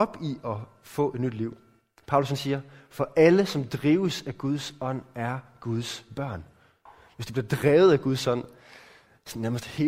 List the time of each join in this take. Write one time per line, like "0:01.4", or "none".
none